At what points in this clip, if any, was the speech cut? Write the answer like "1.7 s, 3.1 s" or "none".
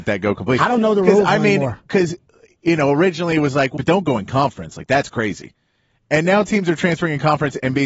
3.8 s